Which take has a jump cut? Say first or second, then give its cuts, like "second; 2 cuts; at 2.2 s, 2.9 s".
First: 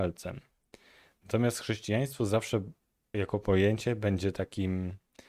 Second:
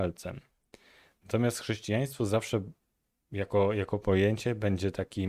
first; 1 cut; at 3.1 s